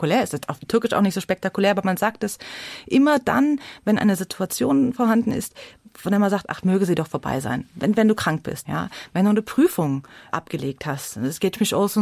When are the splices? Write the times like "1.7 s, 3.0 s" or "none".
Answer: 8.6 s

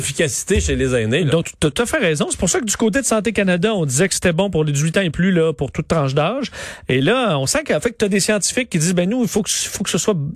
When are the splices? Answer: none

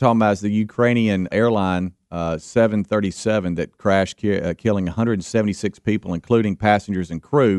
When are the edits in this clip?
1.3 s

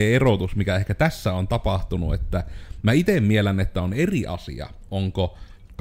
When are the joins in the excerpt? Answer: none

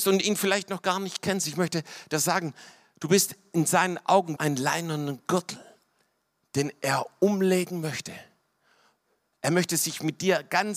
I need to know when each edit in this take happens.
4.4 s

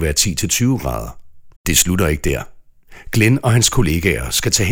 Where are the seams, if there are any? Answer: 1.6 s

